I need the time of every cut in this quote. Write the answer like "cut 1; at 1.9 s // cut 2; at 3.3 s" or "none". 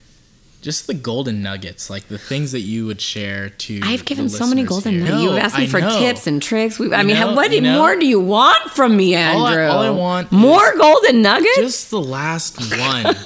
cut 1; at 5.1 s

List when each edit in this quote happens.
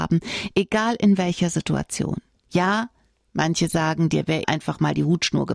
cut 1; at 4.4 s

